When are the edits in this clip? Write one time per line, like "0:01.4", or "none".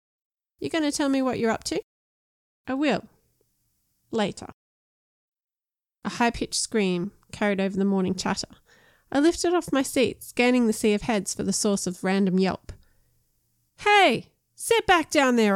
none